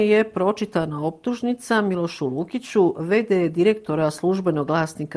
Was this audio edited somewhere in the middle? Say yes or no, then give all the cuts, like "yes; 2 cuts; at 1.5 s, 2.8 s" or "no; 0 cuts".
no; 0 cuts